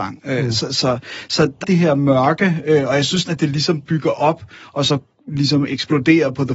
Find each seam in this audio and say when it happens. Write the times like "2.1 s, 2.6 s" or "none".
1.6 s, 3.2 s